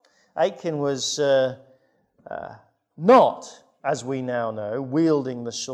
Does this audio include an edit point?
no; 0 cuts

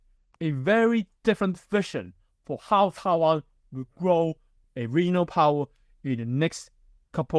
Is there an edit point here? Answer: yes; 1 cut; at 4.6 s

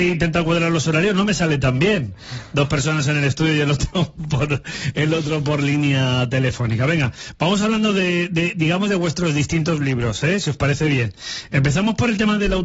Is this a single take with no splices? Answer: yes; 0 cuts

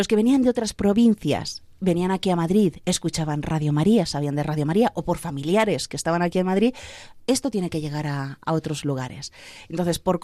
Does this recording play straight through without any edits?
yes; 0 cuts

